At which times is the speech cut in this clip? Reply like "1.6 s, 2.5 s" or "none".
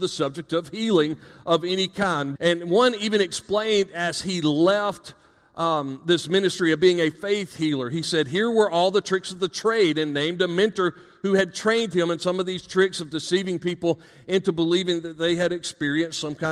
2.4 s